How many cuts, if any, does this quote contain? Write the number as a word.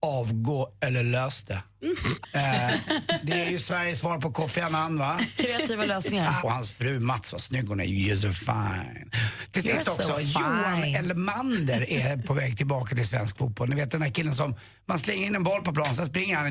two